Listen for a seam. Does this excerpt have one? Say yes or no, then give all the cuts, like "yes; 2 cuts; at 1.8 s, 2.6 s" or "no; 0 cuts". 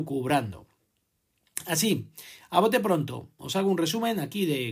no; 0 cuts